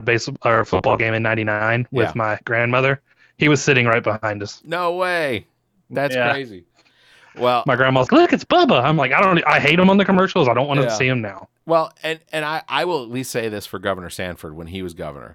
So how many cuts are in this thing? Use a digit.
1